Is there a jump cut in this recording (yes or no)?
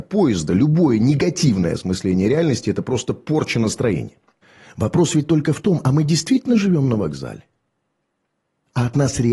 no